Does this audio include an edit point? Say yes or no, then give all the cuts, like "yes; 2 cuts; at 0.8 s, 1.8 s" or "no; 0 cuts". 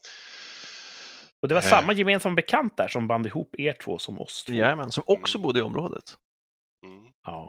no; 0 cuts